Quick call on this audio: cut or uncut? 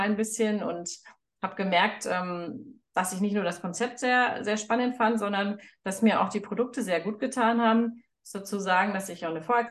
uncut